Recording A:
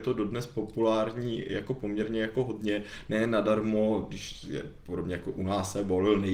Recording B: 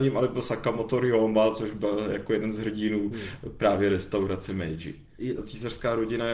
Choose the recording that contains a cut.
B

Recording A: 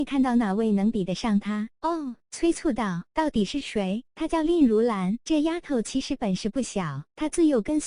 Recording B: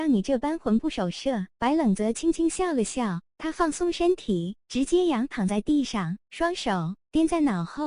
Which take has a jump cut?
A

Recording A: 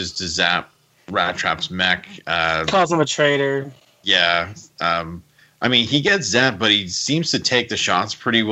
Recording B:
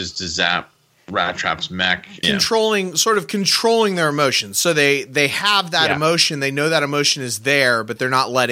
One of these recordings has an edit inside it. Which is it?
B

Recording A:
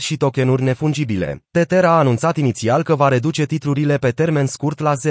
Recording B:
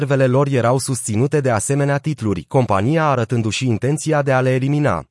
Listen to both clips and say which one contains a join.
A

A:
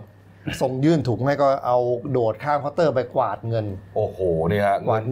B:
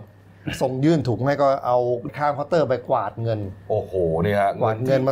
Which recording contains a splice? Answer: B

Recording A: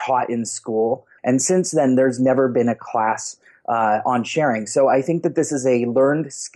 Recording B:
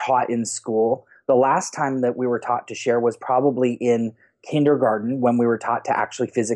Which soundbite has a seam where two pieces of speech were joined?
A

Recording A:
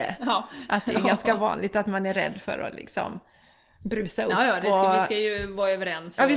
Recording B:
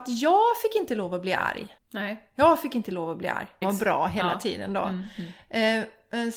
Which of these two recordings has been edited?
B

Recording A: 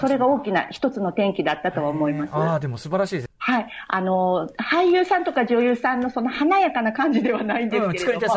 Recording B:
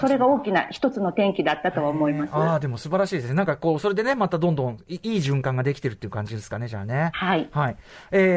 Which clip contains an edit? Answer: A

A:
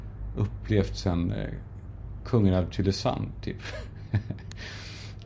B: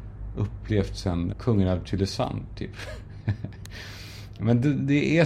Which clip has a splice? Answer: B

